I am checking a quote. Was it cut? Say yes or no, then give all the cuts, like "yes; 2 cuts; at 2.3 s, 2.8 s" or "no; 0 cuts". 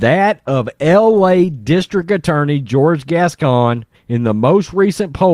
yes; 1 cut; at 3.9 s